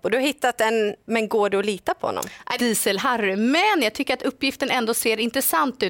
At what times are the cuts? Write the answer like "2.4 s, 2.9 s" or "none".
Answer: 1.0 s, 2.6 s